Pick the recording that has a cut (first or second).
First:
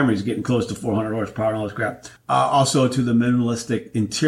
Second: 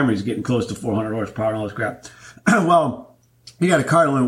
first